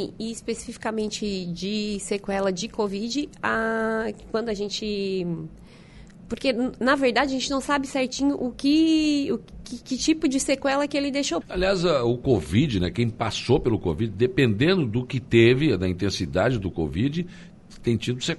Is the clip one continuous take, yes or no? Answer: no